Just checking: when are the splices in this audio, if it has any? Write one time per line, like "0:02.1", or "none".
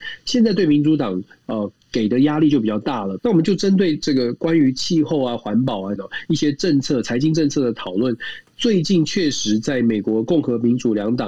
0:03.2
0:06.0